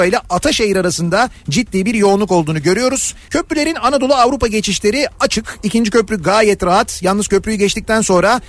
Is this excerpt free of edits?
no; 1 cut; at 3.3 s

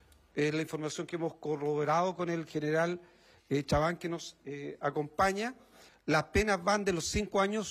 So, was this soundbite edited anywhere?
no; 0 cuts

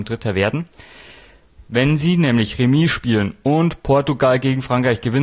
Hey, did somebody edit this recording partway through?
no; 0 cuts

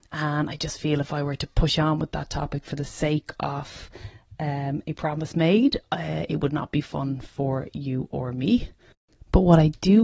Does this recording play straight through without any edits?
yes; 0 cuts

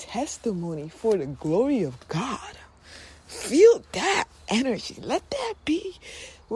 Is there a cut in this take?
no; 0 cuts

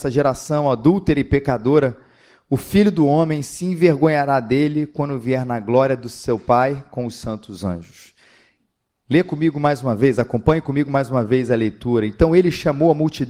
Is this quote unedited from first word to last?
yes; 0 cuts

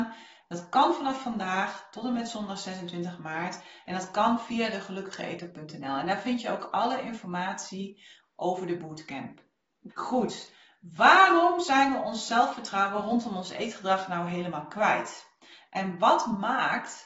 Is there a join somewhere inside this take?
yes; 1 cut; at 9.9 s

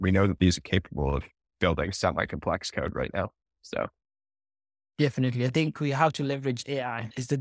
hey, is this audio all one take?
yes; 0 cuts

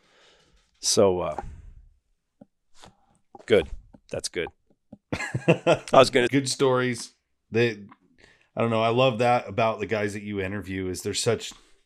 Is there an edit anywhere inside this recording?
yes; 1 cut; at 6.3 s

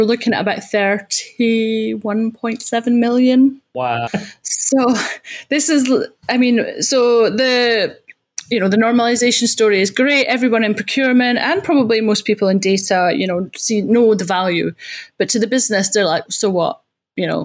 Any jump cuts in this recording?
yes; 2 cuts; at 4.1 s, 16.3 s

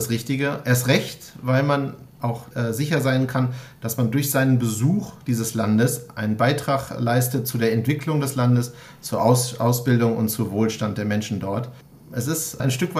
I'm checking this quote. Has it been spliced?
no; 0 cuts

